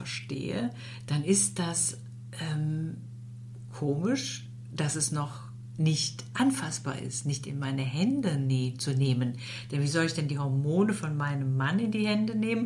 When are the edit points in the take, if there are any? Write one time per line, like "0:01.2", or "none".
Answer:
none

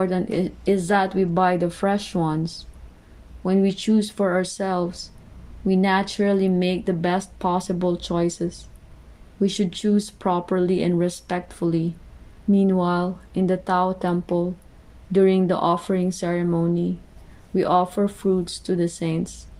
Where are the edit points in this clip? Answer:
0:09.3
0:12.4

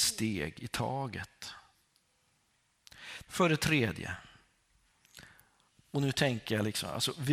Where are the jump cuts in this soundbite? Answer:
0:03.2

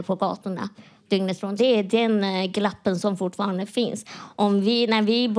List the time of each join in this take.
0:01.6

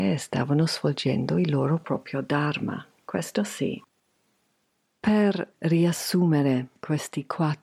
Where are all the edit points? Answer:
none

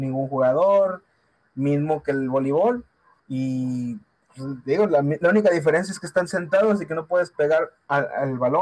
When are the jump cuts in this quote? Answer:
0:03.2

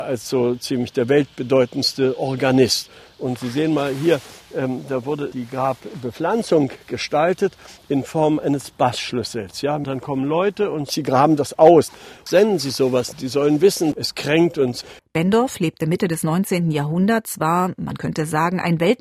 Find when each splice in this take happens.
0:15.0

